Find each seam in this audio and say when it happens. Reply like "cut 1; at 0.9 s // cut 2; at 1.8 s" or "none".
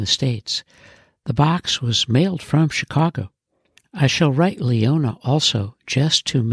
cut 1; at 3.8 s